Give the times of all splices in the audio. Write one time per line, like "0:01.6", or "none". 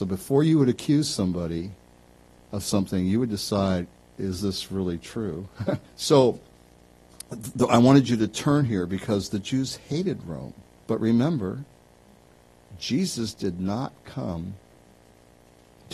0:05.8
0:10.8